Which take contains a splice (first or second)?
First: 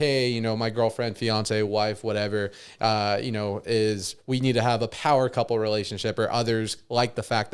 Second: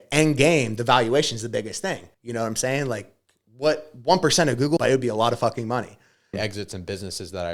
second